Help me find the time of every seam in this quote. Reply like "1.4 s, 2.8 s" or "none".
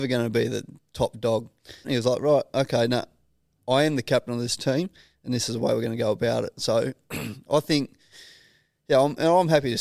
1.8 s